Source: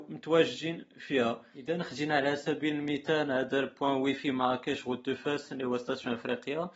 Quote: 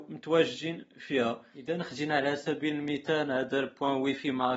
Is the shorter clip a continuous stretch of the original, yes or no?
yes